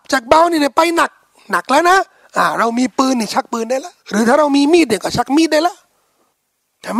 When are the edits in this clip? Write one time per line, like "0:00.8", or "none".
0:04.0

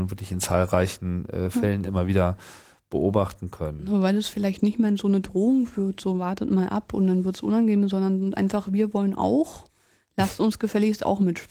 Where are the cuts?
none

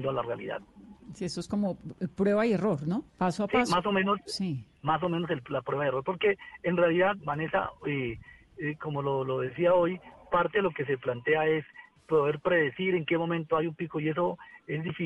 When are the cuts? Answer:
0:03.1
0:07.2

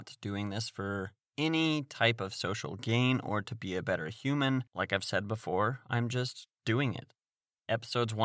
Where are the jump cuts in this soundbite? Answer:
0:04.7
0:06.6

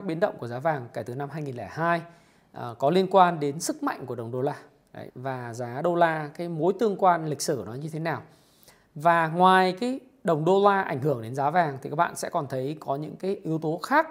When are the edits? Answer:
0:05.1

